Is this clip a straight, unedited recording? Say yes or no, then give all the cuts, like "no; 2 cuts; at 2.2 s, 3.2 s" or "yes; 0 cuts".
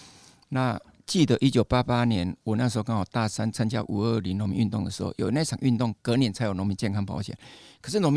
yes; 0 cuts